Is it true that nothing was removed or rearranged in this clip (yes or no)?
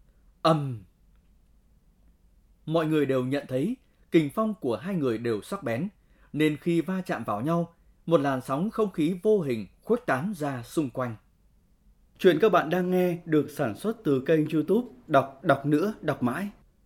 yes